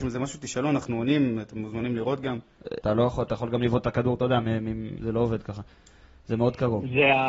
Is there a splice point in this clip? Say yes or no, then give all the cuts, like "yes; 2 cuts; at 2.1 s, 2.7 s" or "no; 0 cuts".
yes; 2 cuts; at 2.8 s, 5.0 s